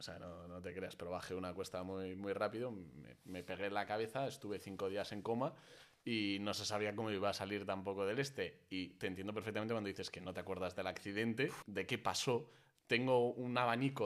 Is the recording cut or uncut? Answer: cut